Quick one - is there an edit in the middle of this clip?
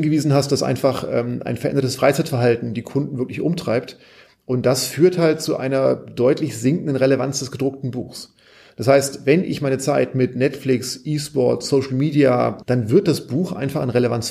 yes; 1 cut; at 12.6 s

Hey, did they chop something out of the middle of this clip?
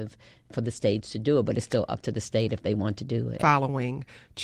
yes; 1 cut; at 3.4 s

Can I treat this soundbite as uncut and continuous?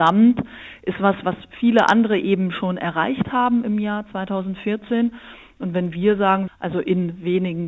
no; 1 cut; at 6.5 s

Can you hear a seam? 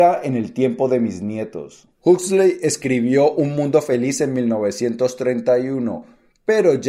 yes; 1 cut; at 1.9 s

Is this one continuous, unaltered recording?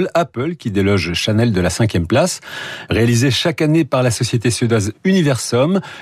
yes; 0 cuts

